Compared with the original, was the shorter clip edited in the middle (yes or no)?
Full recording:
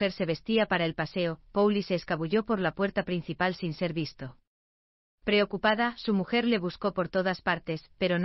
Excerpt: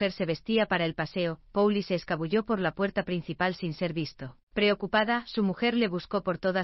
yes